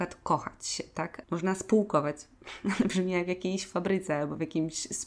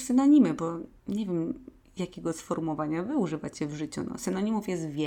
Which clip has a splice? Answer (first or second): first